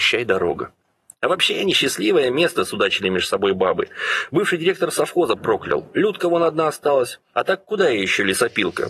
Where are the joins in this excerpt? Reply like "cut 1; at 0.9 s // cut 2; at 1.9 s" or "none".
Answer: cut 1; at 7.3 s